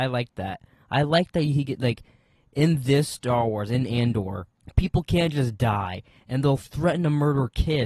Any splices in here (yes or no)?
no